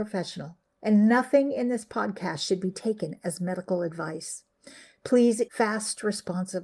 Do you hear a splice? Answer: yes; 1 cut; at 5.5 s

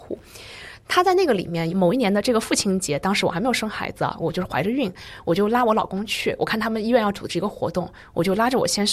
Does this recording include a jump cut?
no; 0 cuts

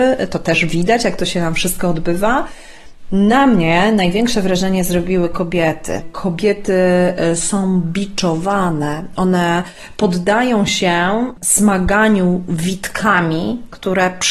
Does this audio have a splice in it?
no; 0 cuts

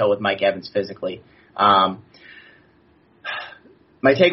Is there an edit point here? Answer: no; 0 cuts

